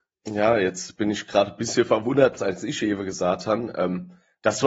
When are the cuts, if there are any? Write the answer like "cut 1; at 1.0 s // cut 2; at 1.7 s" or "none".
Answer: cut 1; at 2.4 s